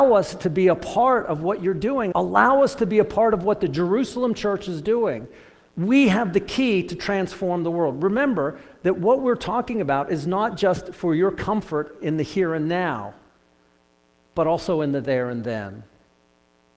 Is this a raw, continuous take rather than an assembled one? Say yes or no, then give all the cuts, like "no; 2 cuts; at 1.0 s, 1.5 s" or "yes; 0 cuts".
no; 1 cut; at 2.1 s